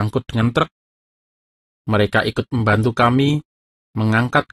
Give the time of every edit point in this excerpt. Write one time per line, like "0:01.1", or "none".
0:01.7